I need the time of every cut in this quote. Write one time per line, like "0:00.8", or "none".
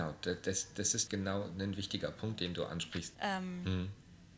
0:01.1
0:03.1